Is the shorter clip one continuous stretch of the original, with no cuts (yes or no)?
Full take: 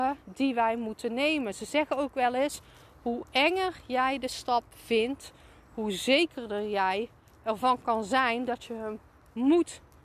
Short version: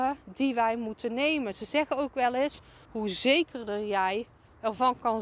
no